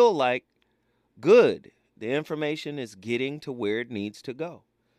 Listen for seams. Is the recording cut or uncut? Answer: uncut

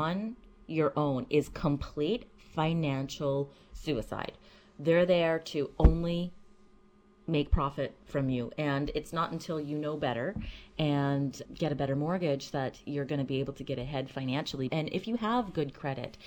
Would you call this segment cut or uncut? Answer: cut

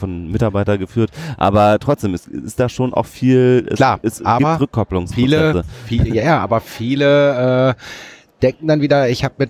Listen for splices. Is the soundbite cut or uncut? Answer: uncut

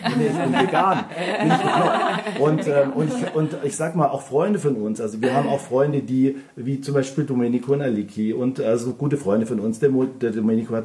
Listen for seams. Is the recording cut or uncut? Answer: uncut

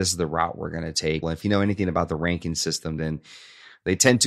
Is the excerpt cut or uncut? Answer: cut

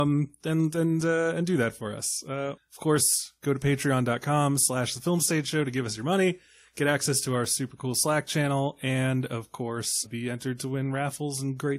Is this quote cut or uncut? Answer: cut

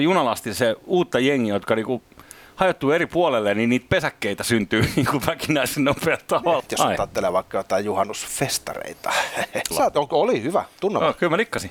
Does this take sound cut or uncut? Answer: cut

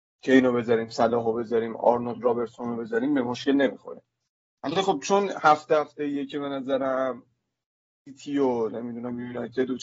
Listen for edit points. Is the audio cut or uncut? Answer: uncut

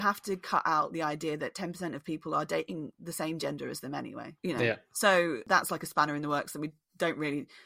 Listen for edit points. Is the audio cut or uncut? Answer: cut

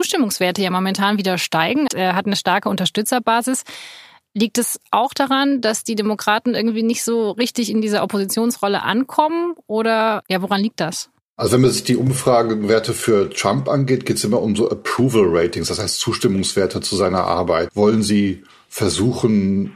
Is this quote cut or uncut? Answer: cut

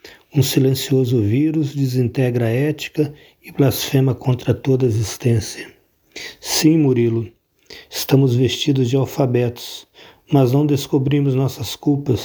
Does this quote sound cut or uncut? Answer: uncut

